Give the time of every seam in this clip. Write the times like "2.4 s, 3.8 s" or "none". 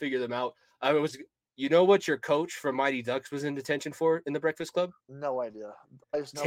5.0 s